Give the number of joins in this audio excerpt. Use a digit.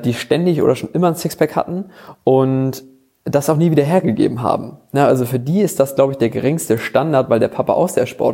0